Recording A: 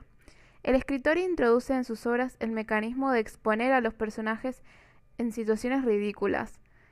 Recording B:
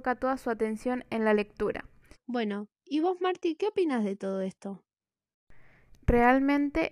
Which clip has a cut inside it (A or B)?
B